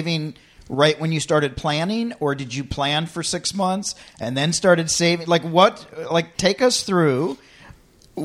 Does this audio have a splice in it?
yes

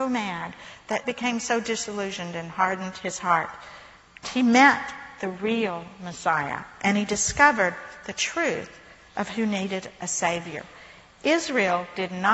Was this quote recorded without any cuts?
no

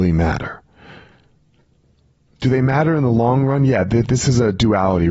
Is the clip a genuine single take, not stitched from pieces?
yes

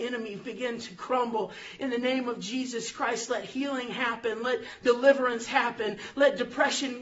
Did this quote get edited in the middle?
no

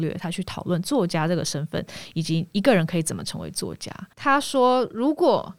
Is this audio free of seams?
no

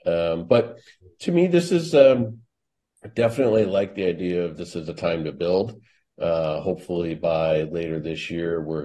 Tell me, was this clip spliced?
no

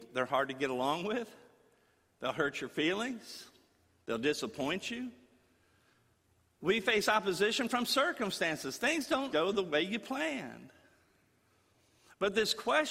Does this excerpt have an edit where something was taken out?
yes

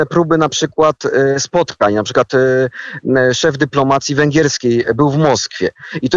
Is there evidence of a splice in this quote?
no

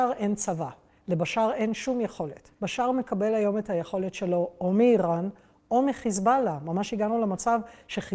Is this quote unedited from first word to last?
yes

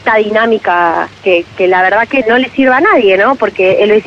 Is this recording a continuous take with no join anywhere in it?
no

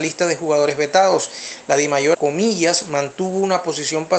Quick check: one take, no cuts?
no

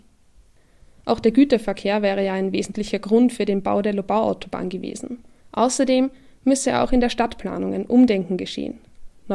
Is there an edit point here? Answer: yes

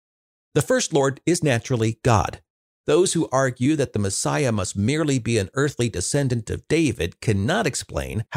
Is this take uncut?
no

